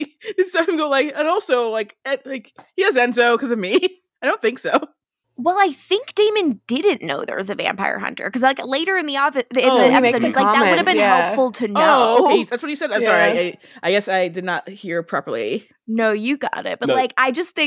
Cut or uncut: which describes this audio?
uncut